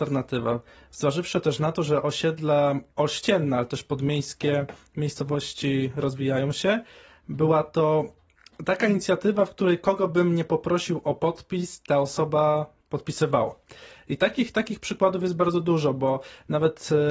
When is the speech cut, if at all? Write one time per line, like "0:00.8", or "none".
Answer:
none